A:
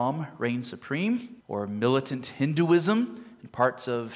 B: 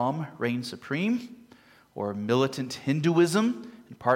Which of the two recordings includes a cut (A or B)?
A